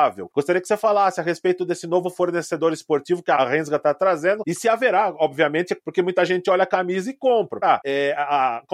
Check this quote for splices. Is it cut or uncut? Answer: cut